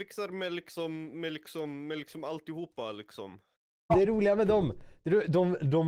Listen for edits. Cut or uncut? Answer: cut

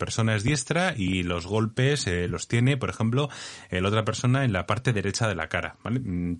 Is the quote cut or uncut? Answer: uncut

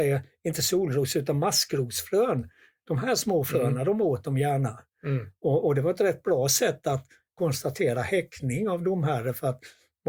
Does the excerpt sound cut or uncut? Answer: uncut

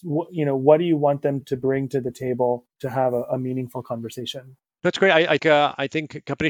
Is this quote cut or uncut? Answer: cut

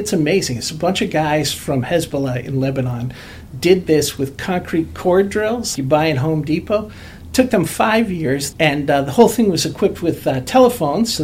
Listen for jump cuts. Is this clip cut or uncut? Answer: cut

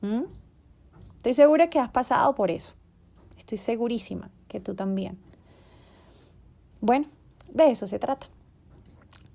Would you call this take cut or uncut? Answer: uncut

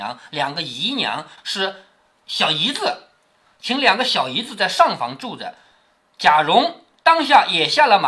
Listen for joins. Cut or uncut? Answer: cut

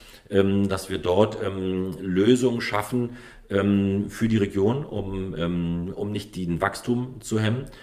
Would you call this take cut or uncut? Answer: uncut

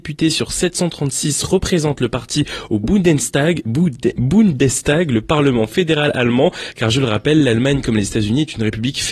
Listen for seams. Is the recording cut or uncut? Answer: uncut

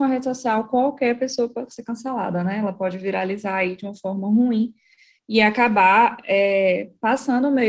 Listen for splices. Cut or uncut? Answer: uncut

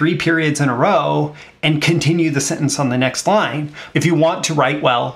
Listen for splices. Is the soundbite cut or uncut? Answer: cut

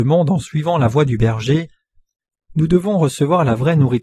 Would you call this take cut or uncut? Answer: cut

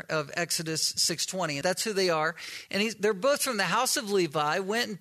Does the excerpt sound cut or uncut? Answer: cut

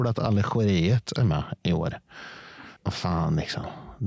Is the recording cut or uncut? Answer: cut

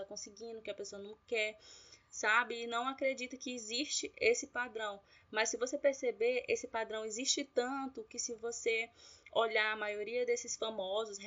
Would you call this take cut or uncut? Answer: uncut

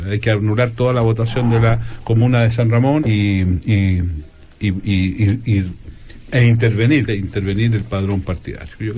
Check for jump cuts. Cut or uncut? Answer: cut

